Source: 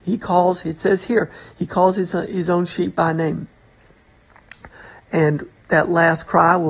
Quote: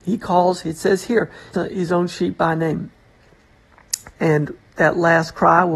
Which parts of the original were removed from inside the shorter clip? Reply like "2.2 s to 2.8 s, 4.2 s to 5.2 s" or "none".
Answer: 1.5 s to 2.1 s, 4.7 s to 5.0 s